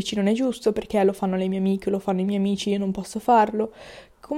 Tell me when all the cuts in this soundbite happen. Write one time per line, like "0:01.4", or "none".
none